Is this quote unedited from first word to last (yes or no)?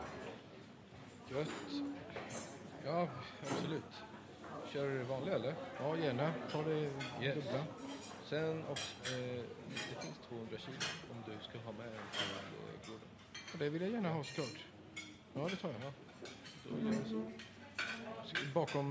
yes